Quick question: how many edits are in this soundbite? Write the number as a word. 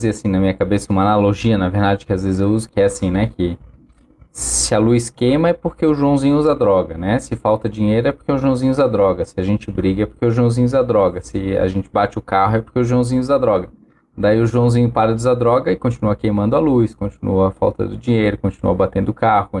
one